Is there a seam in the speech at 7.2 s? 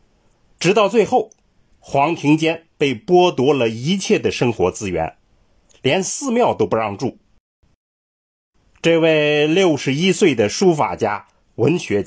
no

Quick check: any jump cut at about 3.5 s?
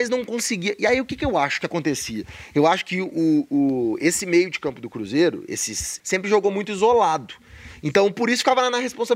no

